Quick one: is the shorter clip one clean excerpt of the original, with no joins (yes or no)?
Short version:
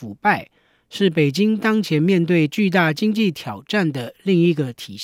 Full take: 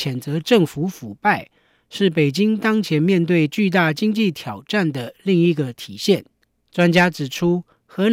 yes